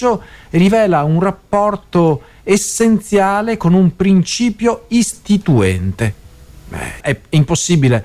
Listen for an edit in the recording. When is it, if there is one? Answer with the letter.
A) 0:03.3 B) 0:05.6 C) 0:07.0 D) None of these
C